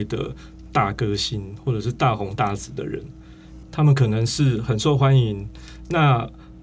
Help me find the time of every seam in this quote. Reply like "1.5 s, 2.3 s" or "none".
3.6 s